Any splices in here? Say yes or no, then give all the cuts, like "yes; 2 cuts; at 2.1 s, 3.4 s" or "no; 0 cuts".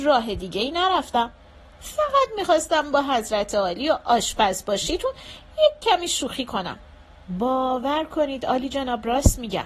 no; 0 cuts